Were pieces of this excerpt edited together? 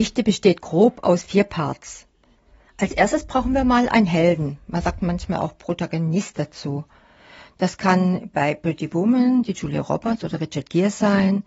no; 0 cuts

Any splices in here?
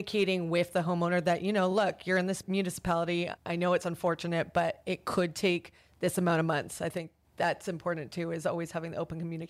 no; 0 cuts

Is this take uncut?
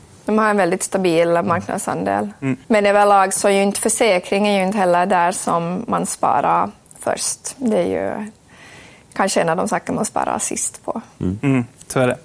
no; 1 cut; at 2.6 s

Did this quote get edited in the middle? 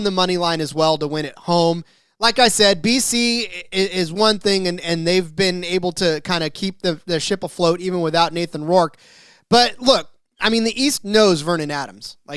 no; 0 cuts

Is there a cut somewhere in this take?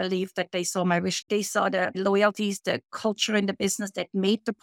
yes; 1 cut; at 1.2 s

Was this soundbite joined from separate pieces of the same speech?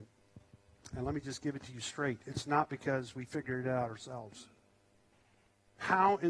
no; 0 cuts

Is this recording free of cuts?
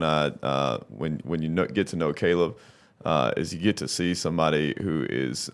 yes; 0 cuts

